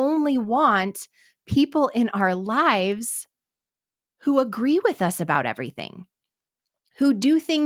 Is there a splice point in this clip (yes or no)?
no